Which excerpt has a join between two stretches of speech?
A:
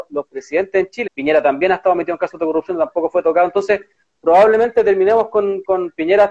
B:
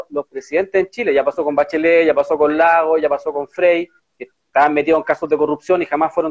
A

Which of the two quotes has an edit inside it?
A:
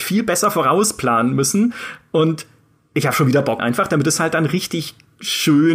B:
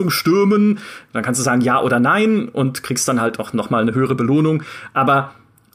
A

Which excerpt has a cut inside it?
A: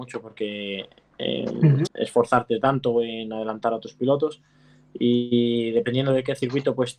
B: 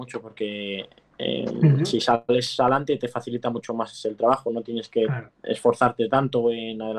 A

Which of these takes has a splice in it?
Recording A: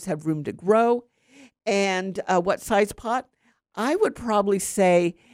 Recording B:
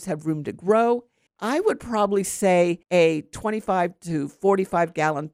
B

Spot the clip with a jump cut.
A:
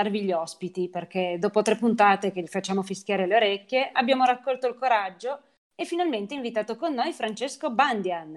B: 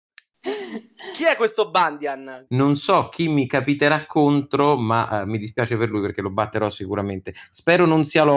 B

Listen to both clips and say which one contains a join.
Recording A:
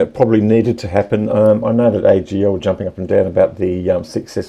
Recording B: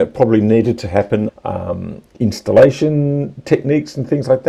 B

